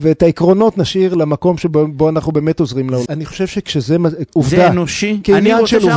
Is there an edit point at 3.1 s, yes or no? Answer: yes